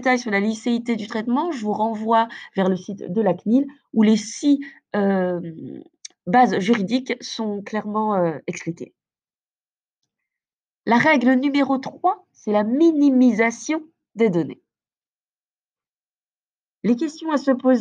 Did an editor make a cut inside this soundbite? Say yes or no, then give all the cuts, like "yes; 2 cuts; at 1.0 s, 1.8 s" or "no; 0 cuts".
no; 0 cuts